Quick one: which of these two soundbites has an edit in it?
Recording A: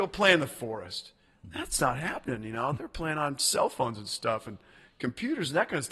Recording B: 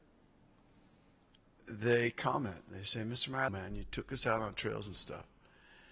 B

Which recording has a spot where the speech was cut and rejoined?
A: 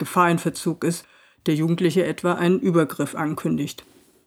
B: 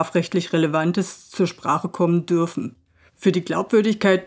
B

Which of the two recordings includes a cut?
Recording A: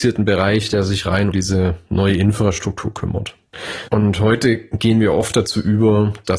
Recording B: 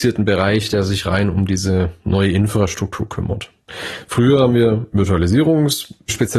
A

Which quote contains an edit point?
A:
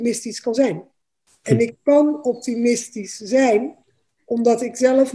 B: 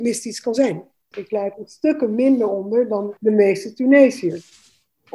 B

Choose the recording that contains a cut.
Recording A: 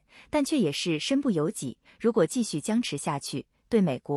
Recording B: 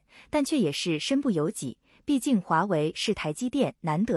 A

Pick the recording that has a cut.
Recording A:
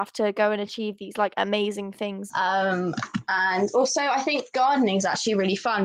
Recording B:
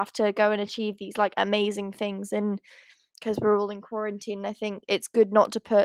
A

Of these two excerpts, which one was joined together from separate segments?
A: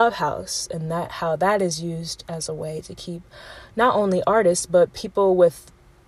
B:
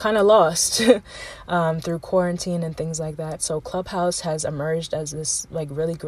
B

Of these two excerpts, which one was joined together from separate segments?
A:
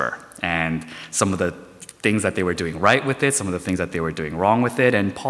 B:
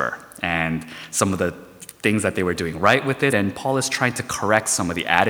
B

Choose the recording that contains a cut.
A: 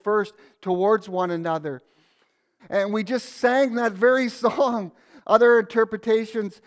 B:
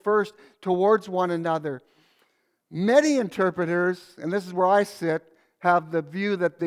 A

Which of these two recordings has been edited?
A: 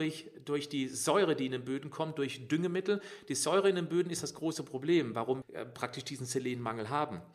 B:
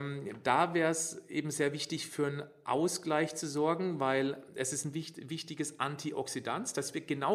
A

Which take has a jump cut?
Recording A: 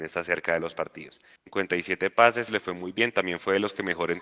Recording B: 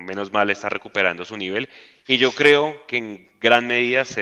A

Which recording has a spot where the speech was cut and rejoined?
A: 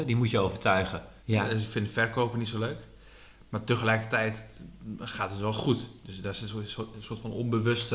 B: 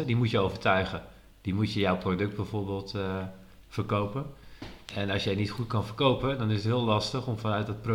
A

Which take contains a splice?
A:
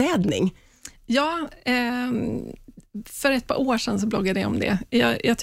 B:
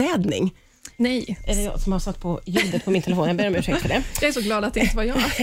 B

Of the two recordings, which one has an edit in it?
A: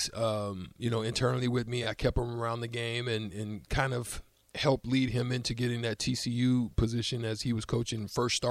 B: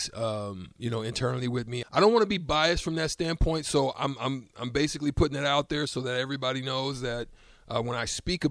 B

